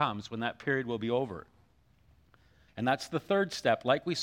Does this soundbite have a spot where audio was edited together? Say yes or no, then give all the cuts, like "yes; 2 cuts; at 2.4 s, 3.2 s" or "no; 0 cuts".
yes; 1 cut; at 2.7 s